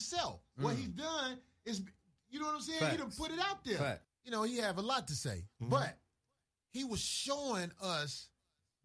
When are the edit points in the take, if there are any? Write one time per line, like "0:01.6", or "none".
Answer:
0:04.0